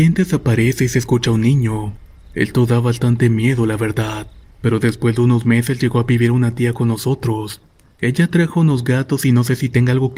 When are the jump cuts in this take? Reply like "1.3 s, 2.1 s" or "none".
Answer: none

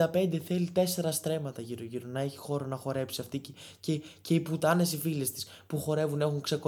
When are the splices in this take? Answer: none

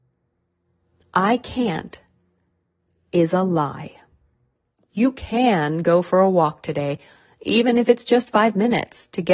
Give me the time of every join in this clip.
4.9 s

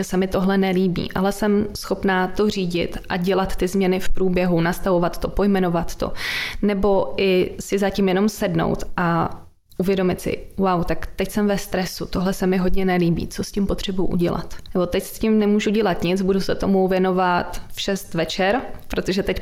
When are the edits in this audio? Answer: none

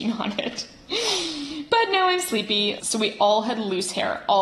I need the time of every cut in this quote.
2.8 s

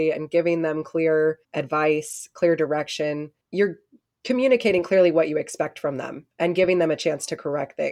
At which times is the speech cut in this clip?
1.4 s, 3.4 s

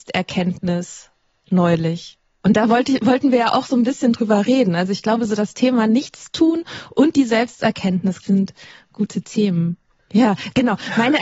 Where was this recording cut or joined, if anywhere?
8.2 s, 10.0 s

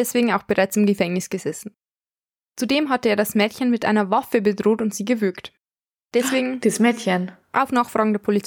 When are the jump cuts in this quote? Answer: 7.4 s

